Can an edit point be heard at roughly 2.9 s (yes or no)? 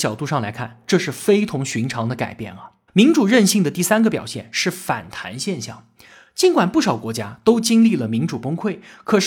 yes